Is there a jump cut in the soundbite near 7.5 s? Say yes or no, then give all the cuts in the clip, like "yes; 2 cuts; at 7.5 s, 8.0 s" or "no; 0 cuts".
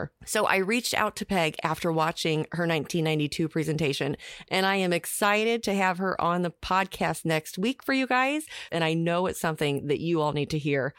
no; 1 cut; at 8.7 s